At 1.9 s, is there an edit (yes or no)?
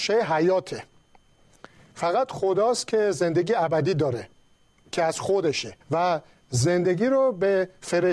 no